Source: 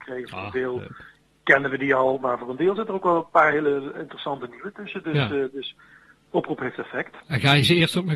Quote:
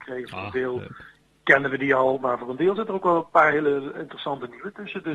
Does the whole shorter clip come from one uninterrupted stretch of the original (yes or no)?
yes